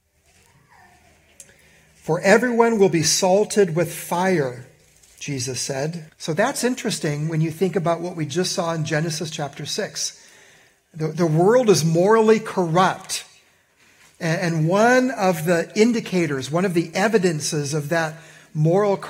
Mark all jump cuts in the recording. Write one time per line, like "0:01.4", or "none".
0:06.1